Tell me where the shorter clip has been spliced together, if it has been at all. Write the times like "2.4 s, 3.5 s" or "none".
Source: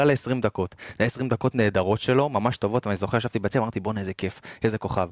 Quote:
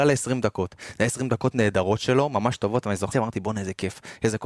3.1 s